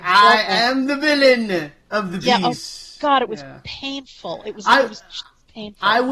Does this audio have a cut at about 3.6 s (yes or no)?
no